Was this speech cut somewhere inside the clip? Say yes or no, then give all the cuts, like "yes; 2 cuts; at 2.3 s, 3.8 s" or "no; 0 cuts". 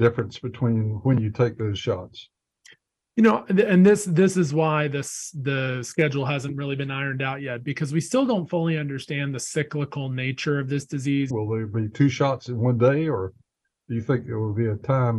yes; 1 cut; at 11.3 s